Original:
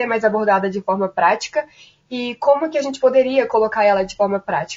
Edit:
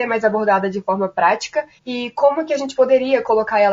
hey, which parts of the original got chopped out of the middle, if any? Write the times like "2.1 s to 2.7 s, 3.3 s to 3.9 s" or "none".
1.8 s to 2.0 s